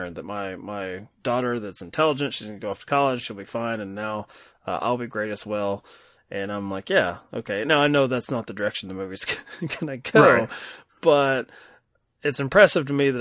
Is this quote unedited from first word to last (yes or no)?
no